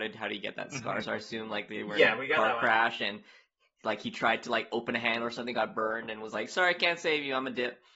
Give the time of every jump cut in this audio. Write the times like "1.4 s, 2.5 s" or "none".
none